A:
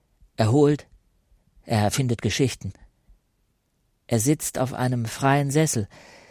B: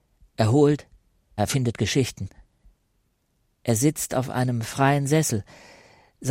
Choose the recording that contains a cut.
B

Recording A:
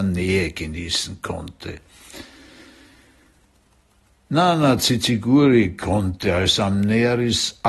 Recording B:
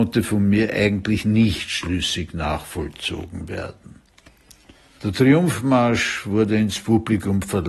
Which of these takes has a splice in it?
B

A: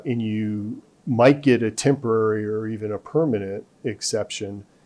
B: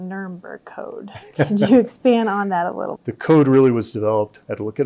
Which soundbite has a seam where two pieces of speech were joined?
B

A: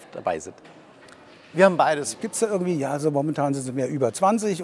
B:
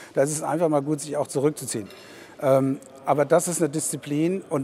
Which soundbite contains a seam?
A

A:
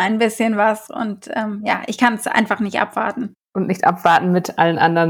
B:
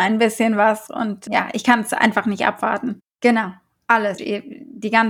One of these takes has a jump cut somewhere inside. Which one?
B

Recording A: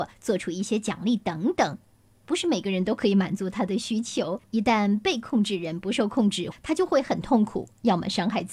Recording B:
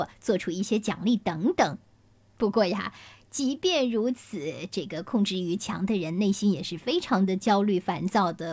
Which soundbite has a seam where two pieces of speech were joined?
A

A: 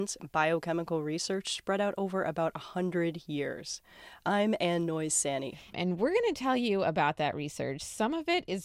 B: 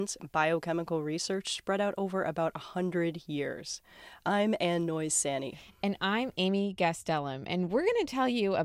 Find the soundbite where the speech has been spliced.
A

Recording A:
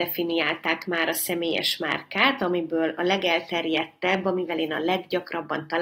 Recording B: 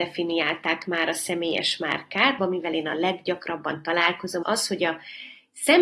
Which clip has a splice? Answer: B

